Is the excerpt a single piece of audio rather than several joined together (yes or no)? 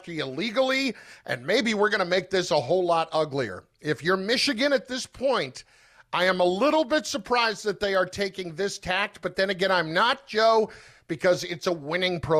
yes